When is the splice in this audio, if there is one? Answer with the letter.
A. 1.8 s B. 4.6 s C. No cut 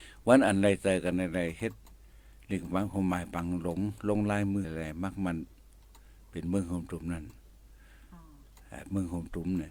B